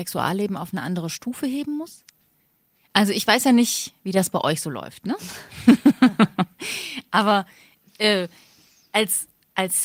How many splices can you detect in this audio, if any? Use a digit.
0